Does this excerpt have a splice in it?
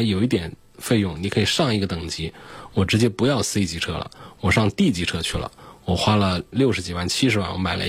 no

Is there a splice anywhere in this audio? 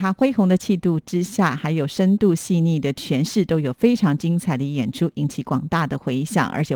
no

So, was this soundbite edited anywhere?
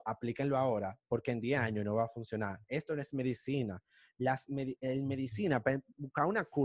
no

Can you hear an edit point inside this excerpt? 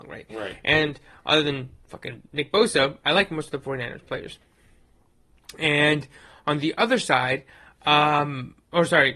no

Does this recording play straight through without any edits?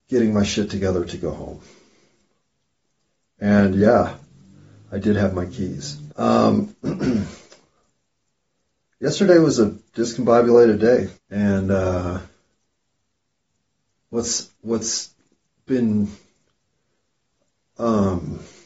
no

